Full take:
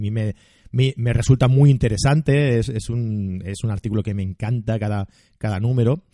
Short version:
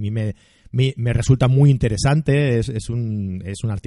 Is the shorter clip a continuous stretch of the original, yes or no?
yes